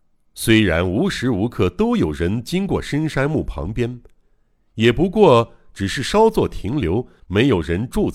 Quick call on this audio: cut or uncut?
cut